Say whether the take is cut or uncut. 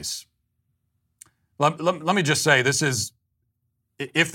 uncut